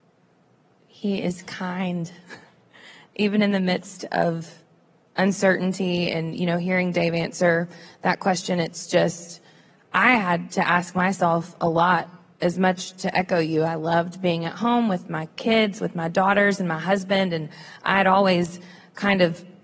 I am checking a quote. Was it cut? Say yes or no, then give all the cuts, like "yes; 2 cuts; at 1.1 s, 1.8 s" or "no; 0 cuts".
no; 0 cuts